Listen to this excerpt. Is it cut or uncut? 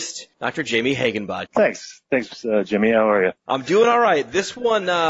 cut